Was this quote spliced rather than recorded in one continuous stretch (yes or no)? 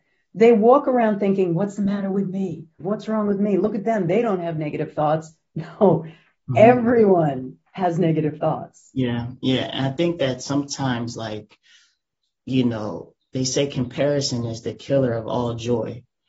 yes